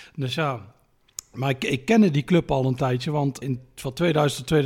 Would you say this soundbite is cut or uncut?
cut